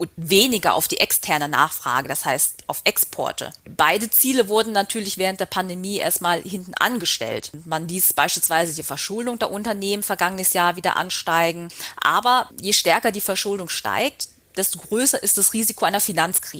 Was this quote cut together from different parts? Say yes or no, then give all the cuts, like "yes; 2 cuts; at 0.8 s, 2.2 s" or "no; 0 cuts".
no; 0 cuts